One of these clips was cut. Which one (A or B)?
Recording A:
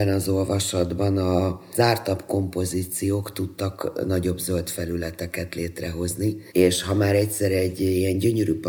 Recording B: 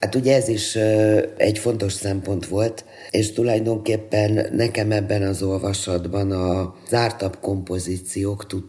A